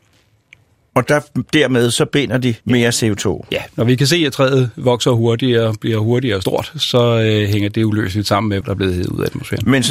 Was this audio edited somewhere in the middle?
yes; 2 cuts; at 2.6 s, 8.6 s

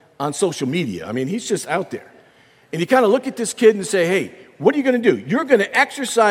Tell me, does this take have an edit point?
no; 0 cuts

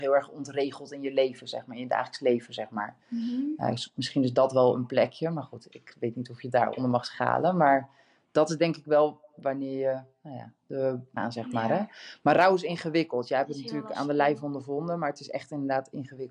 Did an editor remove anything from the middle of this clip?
yes; 1 cut; at 11.2 s

